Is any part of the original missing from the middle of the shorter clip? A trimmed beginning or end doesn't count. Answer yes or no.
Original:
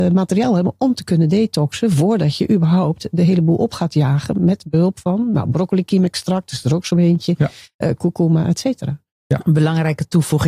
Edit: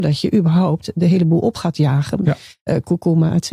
yes